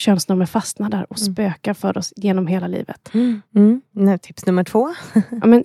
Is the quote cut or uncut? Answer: cut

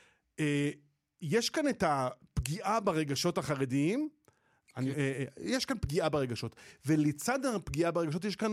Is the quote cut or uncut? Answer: cut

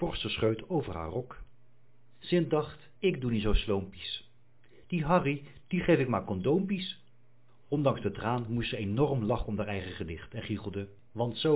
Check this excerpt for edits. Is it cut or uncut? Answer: cut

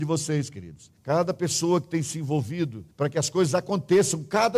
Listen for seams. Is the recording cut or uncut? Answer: cut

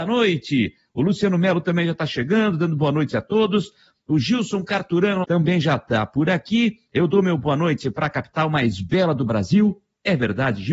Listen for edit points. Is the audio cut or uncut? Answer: cut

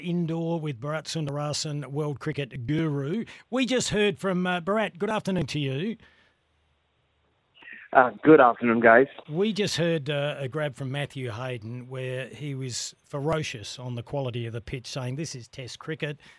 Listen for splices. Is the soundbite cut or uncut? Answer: uncut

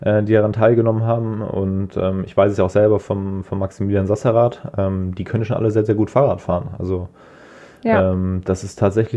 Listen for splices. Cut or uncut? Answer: uncut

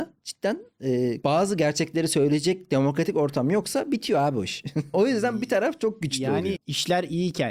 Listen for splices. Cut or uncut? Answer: cut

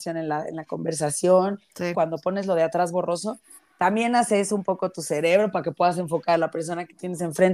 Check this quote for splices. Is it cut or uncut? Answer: cut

